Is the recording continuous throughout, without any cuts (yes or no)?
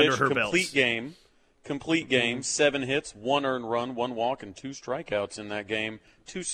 yes